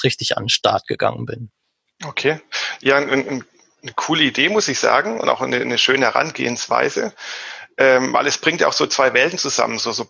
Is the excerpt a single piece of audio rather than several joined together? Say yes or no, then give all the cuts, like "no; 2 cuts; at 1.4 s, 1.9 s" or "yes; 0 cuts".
yes; 0 cuts